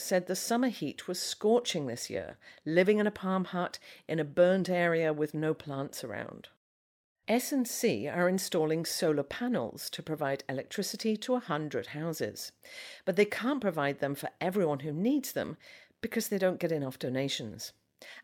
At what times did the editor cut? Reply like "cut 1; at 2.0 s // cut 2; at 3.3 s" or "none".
cut 1; at 7.1 s